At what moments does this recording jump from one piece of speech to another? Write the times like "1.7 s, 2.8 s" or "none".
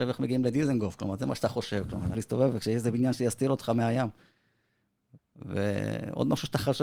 2.1 s, 5.2 s